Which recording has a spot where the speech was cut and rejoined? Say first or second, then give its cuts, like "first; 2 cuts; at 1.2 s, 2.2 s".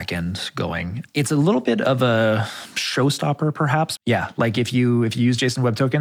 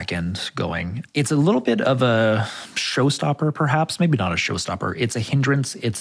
first; 1 cut; at 4.0 s